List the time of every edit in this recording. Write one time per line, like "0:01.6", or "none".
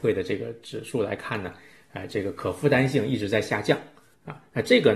none